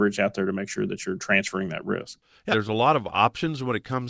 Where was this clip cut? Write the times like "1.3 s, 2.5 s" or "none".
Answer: 2.5 s